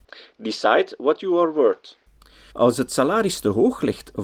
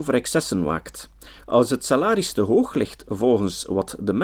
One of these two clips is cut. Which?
first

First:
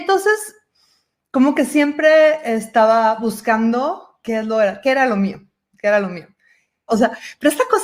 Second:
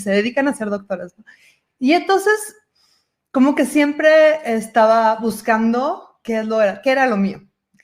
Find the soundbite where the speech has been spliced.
first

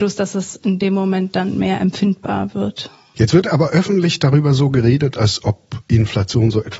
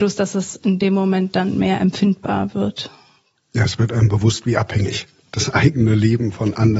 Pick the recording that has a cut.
first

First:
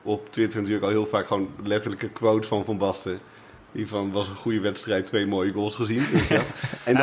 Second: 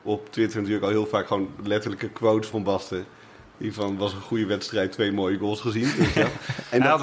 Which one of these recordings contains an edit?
second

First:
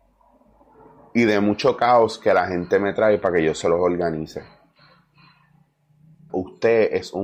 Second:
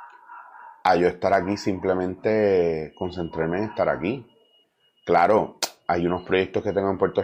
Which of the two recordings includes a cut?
first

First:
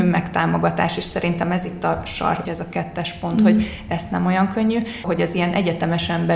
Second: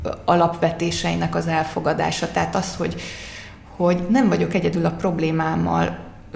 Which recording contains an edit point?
first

